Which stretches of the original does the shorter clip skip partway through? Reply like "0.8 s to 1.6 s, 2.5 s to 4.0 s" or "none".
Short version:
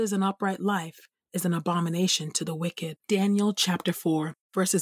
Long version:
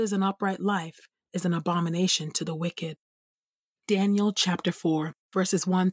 3.0 s to 3.8 s